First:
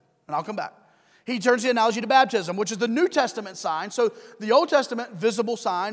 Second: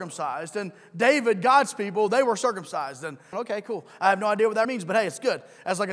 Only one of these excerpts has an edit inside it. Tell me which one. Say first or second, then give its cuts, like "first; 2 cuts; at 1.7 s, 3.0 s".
second; 2 cuts; at 3.3 s, 4.6 s